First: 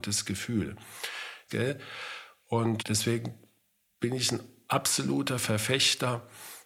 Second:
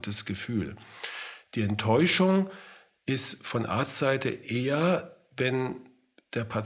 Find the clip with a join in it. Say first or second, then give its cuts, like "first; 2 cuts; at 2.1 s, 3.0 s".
first; 2 cuts; at 1.5 s, 2.8 s